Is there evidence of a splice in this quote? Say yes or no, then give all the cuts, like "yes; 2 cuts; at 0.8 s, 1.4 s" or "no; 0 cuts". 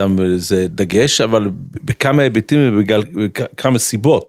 no; 0 cuts